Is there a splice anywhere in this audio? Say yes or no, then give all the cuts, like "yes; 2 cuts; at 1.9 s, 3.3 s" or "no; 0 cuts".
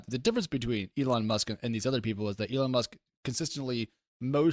no; 0 cuts